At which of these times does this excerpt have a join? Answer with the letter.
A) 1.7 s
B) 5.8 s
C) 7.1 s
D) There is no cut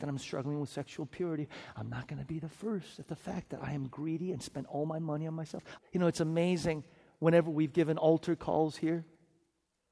B